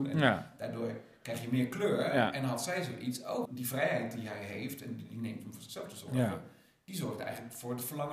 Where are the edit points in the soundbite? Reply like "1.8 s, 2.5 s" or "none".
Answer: 3.5 s